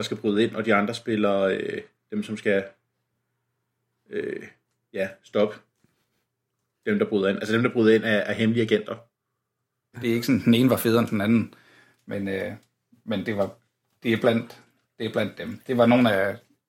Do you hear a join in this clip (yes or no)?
yes